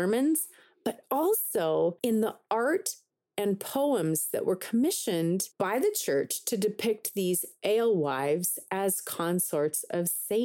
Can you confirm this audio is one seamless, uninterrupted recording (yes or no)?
yes